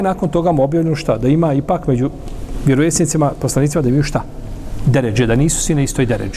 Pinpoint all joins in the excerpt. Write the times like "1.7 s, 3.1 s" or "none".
none

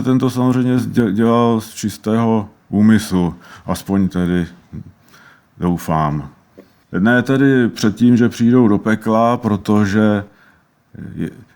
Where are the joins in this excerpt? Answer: 6.9 s

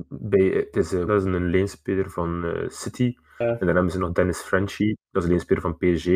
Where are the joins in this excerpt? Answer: 1.1 s

